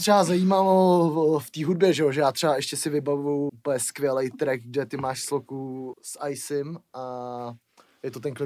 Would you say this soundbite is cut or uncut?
cut